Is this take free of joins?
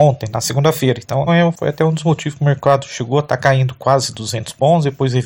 no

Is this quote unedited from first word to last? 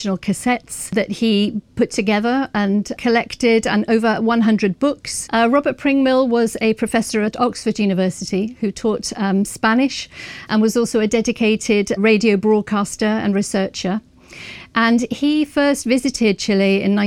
no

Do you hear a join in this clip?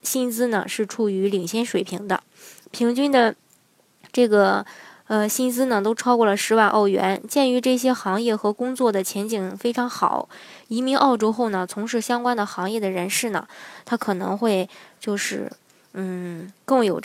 no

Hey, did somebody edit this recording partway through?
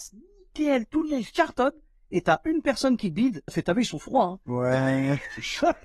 yes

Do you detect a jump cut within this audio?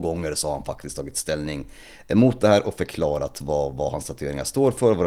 no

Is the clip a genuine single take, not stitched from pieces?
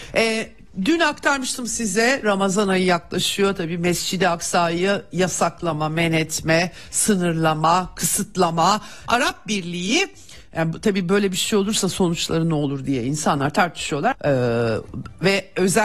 no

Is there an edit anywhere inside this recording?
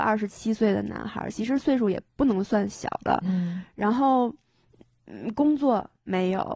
no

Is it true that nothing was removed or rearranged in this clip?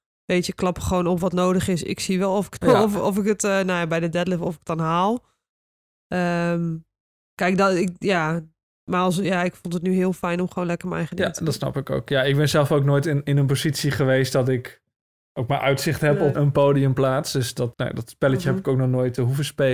no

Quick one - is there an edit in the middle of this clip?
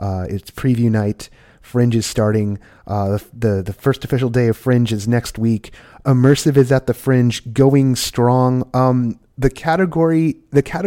no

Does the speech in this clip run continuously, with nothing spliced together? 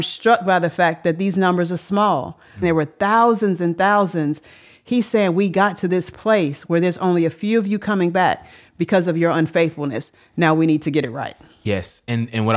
no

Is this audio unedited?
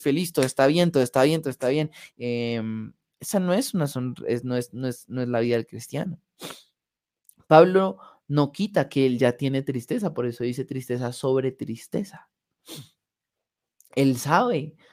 no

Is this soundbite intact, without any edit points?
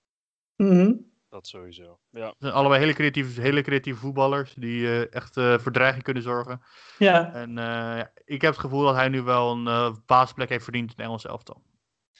yes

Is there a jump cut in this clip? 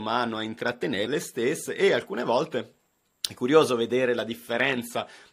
yes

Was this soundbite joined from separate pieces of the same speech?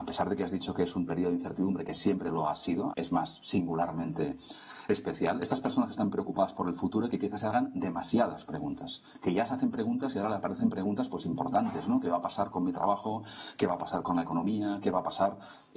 yes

